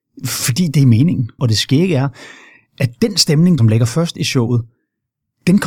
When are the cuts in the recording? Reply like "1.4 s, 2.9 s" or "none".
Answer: 1.4 s, 3.6 s